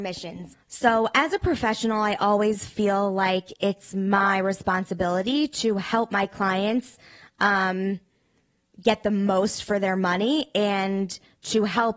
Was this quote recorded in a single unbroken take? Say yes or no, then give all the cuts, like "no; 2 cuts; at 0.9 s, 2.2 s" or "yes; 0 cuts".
yes; 0 cuts